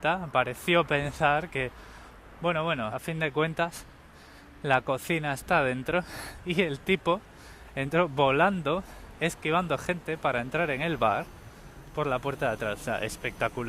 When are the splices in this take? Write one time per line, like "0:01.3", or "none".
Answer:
0:02.9